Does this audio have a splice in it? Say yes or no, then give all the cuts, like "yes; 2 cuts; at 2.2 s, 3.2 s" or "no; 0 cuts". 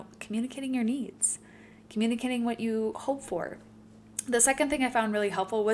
no; 0 cuts